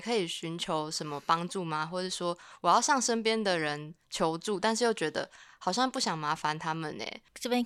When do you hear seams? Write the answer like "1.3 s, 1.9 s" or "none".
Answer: none